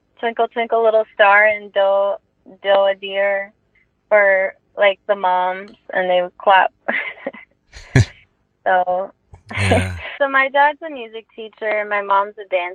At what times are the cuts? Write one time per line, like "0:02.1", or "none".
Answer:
0:10.2

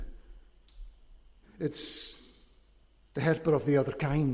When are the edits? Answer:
0:01.4

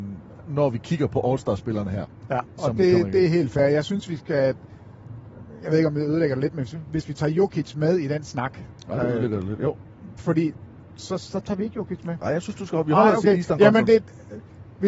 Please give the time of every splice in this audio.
none

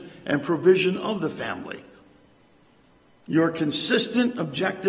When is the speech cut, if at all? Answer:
0:03.1

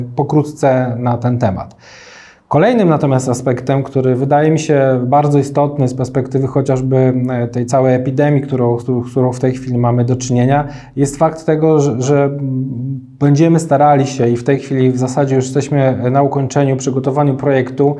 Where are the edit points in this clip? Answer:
none

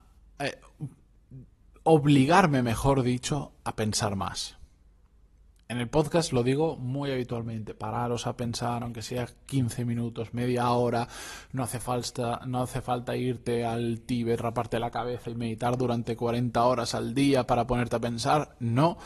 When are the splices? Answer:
none

